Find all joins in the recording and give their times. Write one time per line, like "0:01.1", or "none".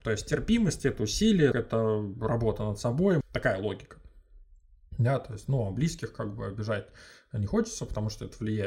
0:01.5
0:03.2